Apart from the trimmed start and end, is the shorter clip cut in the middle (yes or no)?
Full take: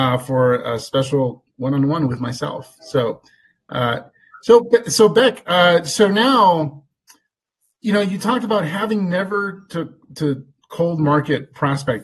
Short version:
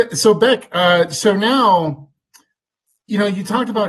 no